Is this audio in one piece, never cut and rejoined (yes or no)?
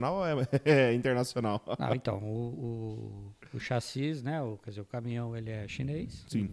yes